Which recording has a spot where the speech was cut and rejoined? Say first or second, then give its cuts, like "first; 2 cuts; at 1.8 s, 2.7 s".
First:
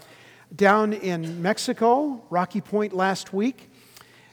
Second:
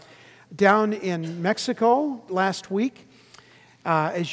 second; 1 cut; at 2.3 s